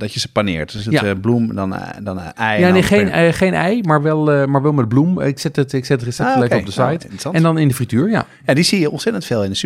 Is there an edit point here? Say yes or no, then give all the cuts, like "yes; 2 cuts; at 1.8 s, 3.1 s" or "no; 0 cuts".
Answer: no; 0 cuts